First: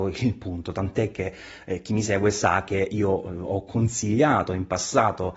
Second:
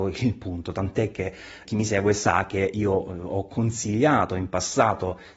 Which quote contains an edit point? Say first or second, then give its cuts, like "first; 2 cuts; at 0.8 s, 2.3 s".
second; 1 cut; at 1.6 s